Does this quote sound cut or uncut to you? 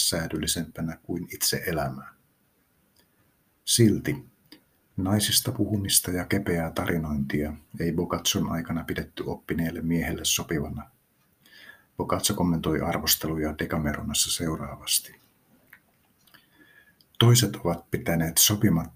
uncut